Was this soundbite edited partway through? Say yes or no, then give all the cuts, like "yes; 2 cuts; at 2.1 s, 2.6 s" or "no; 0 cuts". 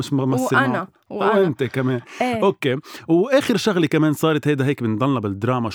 no; 0 cuts